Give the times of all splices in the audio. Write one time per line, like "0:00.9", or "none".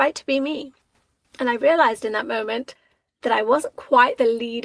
none